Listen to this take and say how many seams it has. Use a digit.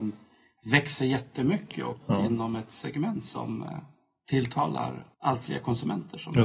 1